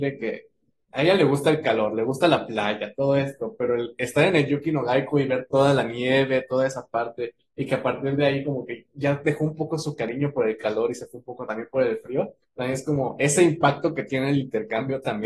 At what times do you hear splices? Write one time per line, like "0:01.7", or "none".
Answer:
none